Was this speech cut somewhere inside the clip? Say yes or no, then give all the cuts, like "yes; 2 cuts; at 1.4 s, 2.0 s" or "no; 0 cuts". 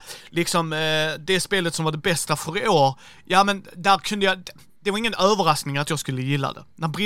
no; 0 cuts